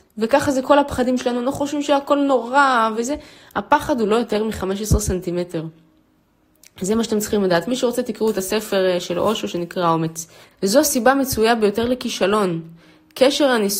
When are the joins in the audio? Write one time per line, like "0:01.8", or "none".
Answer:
0:02.9
0:10.4

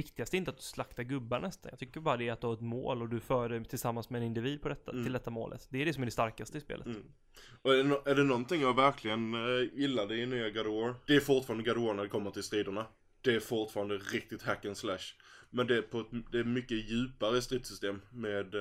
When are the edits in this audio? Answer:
0:11.1

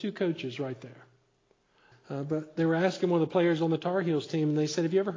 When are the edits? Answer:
0:01.9

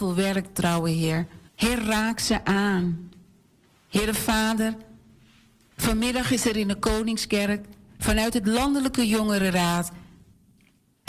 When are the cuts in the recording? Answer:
0:01.5
0:03.7

